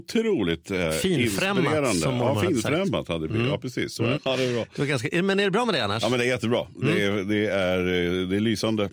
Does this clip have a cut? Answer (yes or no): yes